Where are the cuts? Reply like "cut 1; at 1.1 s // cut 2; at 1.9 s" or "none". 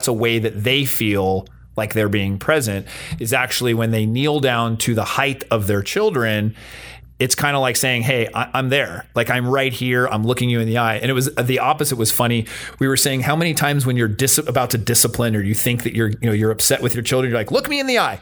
none